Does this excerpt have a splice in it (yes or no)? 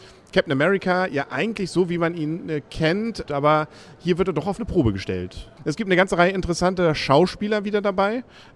yes